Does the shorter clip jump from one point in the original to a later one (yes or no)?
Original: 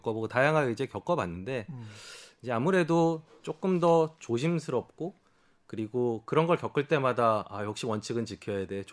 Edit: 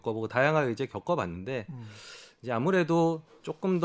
no